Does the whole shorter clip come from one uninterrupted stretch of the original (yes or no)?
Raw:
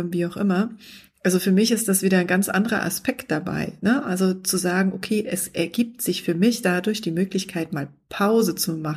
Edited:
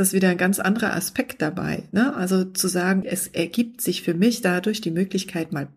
no